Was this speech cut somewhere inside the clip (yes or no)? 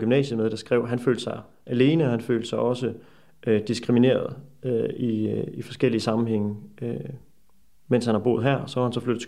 no